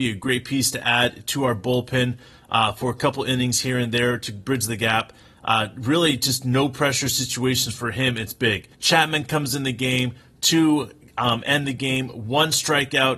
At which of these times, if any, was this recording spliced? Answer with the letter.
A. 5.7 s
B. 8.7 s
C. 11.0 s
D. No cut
B